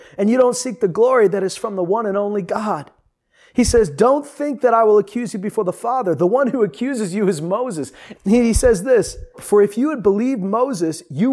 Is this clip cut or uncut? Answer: cut